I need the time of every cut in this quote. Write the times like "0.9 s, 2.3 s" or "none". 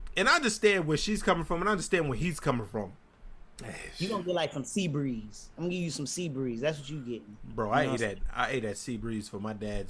3.6 s